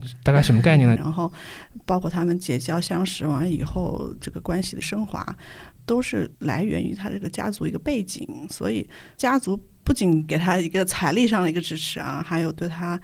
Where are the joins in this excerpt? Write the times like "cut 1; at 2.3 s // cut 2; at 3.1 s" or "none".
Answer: cut 1; at 1.0 s